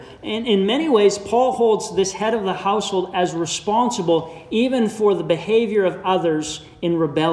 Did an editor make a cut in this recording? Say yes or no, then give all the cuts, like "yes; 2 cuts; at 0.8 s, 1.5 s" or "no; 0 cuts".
no; 0 cuts